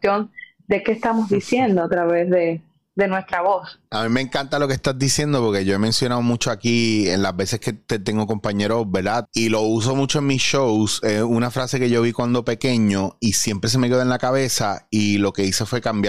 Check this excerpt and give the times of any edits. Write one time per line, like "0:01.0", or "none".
0:09.3